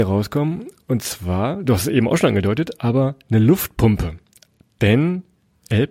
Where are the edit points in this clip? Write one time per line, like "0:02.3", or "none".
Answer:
none